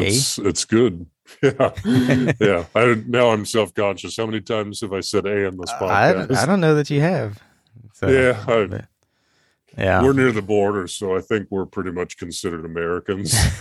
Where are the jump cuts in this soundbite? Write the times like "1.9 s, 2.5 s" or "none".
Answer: none